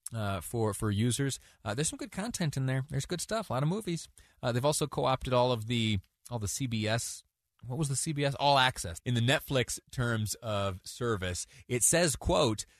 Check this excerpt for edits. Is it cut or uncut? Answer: cut